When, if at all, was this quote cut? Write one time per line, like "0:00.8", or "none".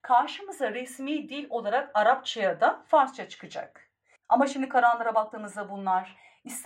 0:04.2